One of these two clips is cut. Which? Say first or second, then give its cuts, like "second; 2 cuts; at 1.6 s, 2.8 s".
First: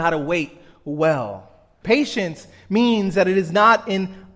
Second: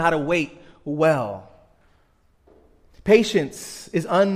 first; 1 cut; at 1.8 s